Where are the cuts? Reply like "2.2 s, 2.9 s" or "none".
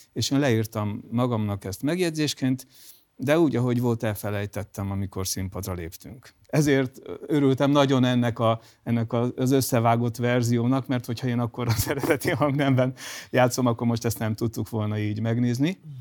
none